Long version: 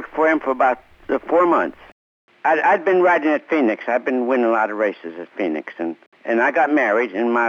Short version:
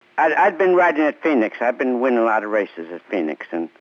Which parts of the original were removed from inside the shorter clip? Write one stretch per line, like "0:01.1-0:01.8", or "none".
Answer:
none

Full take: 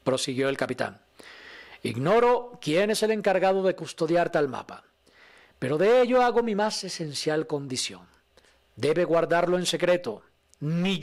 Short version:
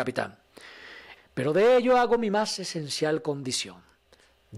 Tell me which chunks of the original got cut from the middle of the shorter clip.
0:01.8-0:05.4

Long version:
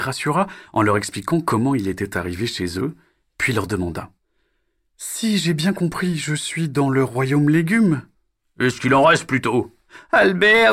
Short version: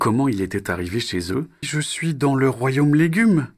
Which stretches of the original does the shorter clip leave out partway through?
0:03.1-0:06.2

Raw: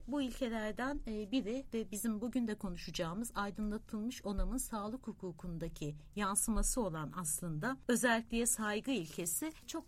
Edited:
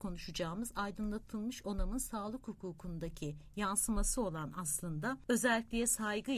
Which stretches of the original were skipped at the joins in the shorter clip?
none

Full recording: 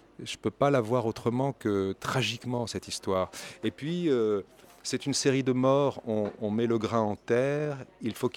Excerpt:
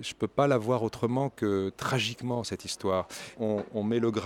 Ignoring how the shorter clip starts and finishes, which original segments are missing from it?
0:03.6-0:06.0

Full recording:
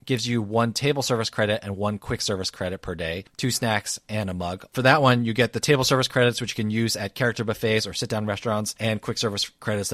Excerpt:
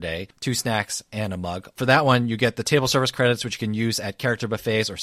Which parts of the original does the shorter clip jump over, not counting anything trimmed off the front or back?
none

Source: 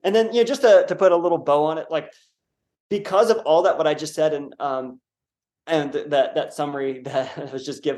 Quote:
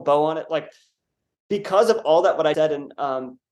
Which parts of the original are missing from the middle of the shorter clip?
0:03.9-0:04.2

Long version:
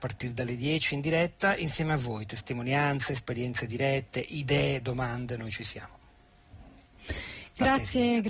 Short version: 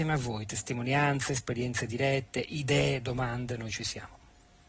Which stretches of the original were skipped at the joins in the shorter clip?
none

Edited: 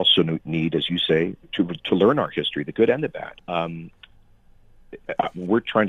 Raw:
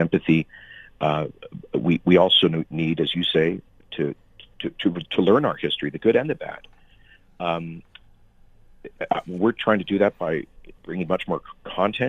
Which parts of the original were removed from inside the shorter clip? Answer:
0:03.7-0:04.7
0:06.7-0:07.3

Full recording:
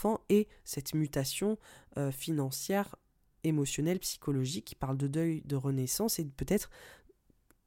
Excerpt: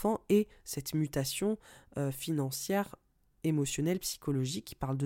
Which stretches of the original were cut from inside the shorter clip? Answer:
none

